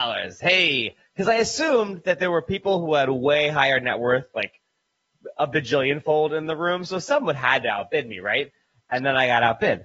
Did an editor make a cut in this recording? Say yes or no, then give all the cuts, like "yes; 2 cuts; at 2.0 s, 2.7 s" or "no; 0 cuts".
no; 0 cuts